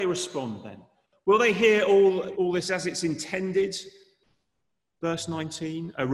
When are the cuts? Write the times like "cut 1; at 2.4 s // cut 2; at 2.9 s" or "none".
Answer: cut 1; at 2.3 s